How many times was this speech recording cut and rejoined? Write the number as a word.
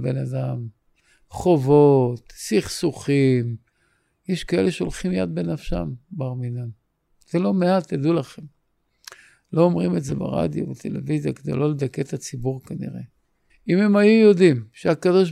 one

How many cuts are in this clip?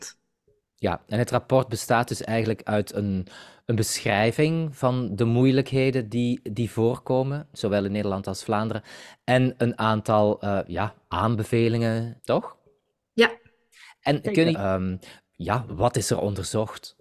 three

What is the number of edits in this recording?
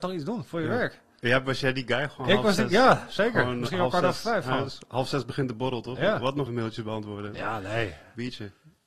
one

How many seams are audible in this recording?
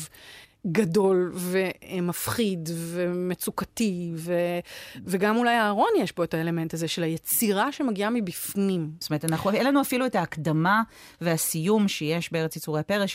one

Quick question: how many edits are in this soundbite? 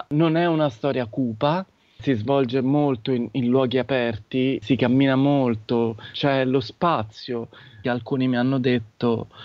one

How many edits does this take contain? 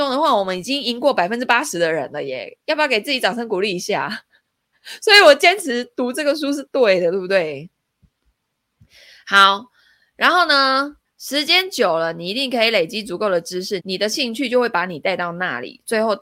one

